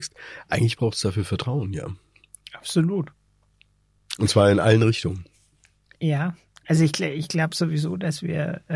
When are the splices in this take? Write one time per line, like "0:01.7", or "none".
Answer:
none